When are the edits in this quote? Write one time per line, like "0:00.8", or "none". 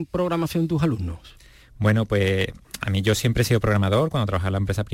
none